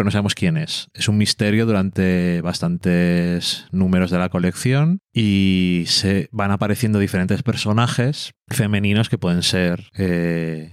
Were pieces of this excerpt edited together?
no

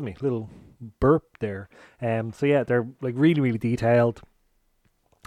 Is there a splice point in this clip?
no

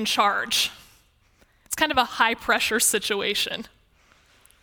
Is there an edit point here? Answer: no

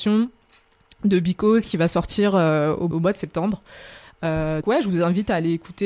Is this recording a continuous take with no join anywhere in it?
no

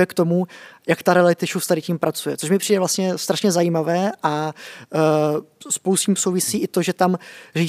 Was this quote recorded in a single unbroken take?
yes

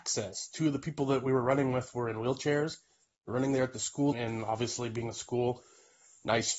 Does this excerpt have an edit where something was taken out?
yes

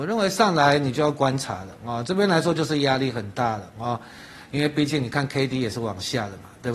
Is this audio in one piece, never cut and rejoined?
yes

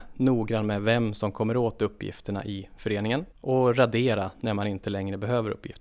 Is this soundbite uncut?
no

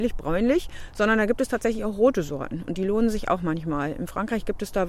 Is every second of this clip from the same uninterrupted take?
yes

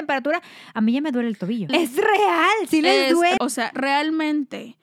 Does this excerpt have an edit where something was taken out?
yes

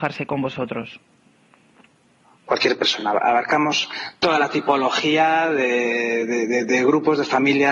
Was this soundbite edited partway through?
no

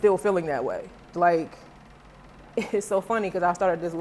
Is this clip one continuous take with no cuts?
no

